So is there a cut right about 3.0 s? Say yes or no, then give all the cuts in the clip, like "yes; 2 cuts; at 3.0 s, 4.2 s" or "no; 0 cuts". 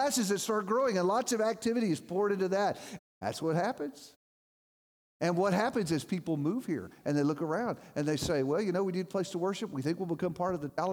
yes; 1 cut; at 3.0 s